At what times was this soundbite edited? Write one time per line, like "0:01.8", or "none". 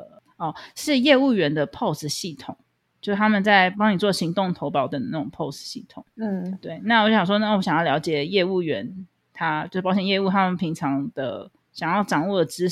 0:03.7
0:04.9